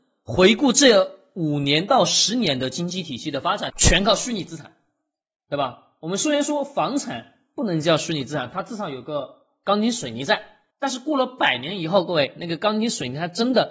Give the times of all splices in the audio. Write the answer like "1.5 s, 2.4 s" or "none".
3.7 s, 10.7 s